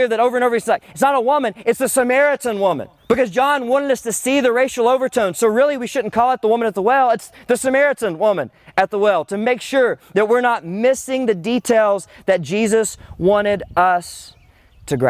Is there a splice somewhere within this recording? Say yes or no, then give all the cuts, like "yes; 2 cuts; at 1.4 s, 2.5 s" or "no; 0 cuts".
yes; 1 cut; at 3.0 s